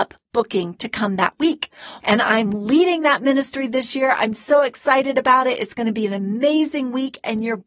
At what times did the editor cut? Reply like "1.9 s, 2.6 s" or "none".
2.0 s